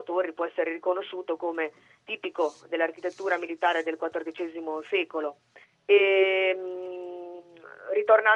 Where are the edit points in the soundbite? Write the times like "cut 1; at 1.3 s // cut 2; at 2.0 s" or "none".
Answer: cut 1; at 5.6 s